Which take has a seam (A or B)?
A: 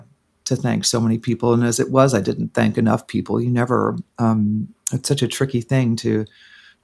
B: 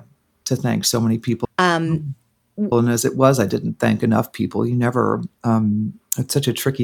B